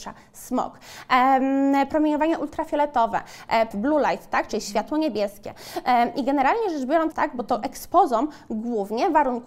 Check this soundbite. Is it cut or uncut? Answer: cut